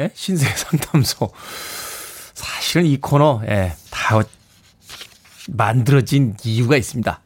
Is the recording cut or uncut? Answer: cut